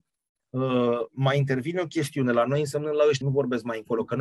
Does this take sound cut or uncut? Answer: cut